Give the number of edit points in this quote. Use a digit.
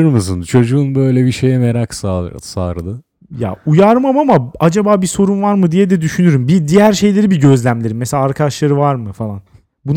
0